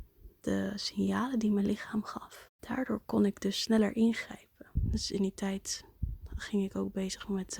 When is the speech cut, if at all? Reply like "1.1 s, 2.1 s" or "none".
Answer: 4.8 s